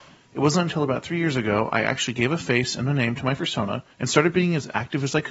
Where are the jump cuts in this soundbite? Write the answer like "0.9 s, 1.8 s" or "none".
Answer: 3.9 s